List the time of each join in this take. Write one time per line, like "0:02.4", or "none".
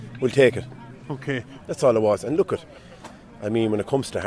0:01.6